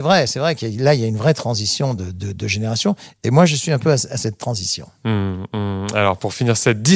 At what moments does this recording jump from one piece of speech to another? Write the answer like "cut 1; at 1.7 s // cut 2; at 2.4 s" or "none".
none